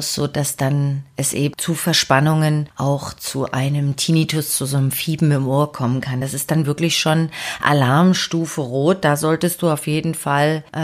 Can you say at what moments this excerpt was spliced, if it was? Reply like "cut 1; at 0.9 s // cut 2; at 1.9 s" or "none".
none